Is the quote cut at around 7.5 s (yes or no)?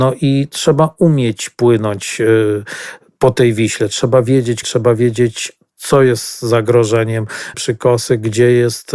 yes